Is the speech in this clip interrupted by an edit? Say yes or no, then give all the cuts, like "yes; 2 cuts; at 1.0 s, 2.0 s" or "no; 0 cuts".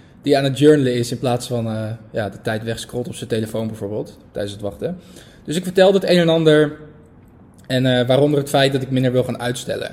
no; 0 cuts